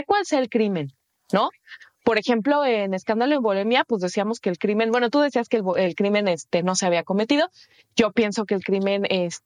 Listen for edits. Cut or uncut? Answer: uncut